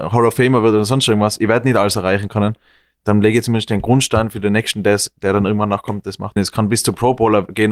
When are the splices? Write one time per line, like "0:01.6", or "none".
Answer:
0:06.4